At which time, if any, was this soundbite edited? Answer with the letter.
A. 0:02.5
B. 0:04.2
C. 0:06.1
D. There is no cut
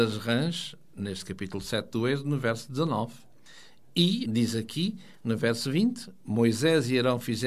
B